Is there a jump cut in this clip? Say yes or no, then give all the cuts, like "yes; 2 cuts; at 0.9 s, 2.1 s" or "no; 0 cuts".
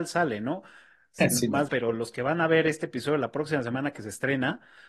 yes; 1 cut; at 1.7 s